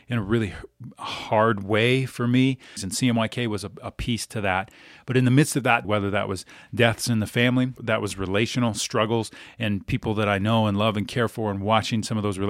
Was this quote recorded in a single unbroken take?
no; 3 cuts; at 2.8 s, 5.8 s, 7.8 s

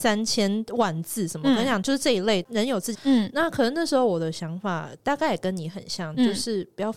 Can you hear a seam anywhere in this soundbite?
yes; 1 cut; at 2.9 s

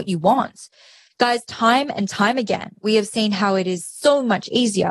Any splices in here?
no; 0 cuts

